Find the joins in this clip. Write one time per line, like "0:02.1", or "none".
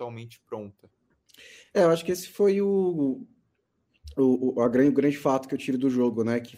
none